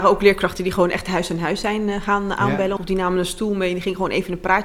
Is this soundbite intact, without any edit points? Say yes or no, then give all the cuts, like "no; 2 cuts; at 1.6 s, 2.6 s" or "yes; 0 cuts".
no; 1 cut; at 2.8 s